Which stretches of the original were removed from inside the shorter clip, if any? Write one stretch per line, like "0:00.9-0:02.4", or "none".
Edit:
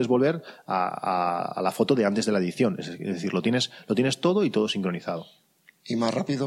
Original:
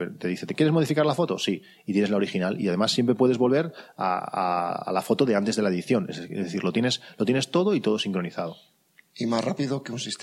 none